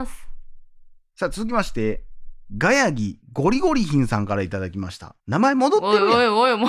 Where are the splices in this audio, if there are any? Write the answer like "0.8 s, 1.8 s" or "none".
5.2 s

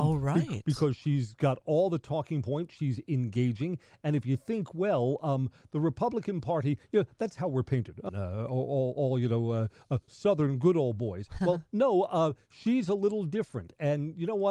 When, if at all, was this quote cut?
8.1 s

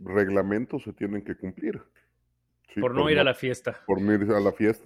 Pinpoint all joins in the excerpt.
2.5 s

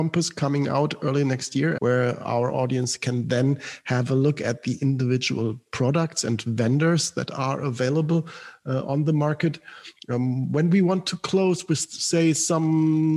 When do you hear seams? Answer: 1.8 s

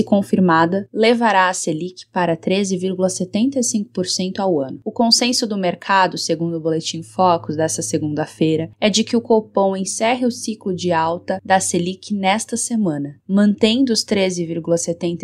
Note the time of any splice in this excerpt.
none

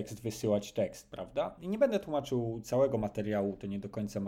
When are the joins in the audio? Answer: 1.6 s

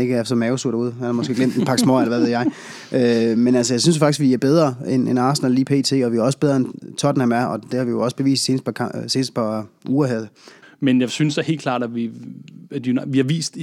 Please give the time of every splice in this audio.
10.6 s

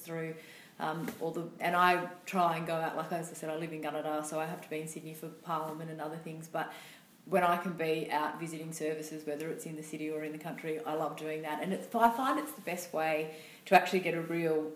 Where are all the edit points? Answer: 1.6 s

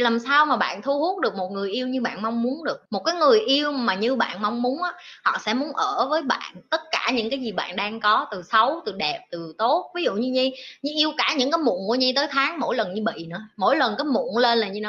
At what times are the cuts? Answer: 2.9 s

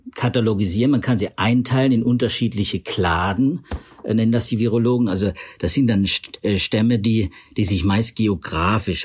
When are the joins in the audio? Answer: none

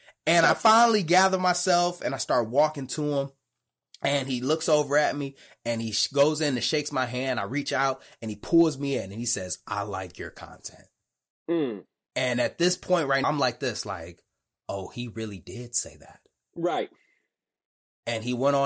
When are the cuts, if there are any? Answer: 13.2 s

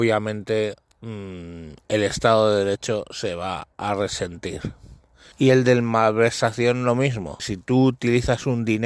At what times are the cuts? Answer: 5.3 s, 7.4 s

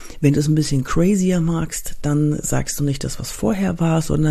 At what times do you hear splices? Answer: none

